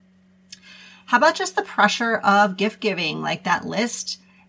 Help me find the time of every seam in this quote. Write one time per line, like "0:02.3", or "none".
none